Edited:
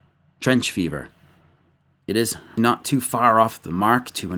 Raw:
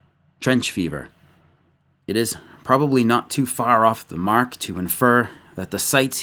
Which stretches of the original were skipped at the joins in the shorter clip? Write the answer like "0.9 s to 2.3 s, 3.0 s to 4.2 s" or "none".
2.6 s to 3.0 s